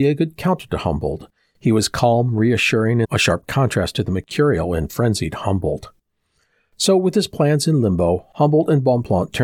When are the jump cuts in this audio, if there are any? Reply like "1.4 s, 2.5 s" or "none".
3.0 s